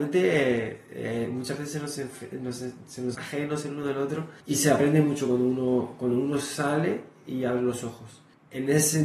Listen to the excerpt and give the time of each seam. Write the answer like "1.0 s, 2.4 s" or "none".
3.1 s, 4.4 s